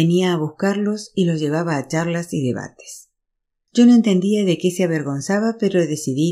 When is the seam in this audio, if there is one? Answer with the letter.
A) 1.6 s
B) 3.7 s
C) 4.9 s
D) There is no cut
B